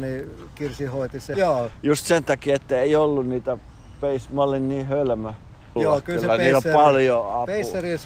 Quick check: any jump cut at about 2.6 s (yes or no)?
no